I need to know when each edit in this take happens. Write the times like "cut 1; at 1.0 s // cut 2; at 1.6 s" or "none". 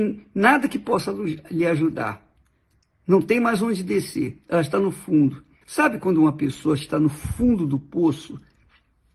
cut 1; at 5.6 s